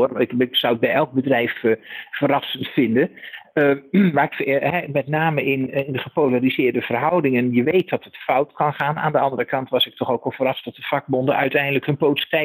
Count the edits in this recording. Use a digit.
1